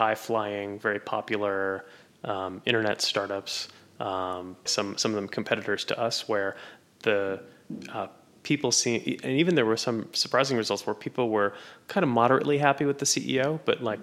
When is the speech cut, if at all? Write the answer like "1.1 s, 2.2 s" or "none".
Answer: 4.7 s